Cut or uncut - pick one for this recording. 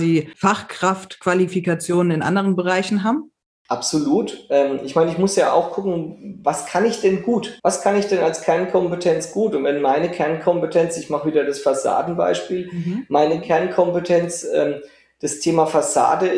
cut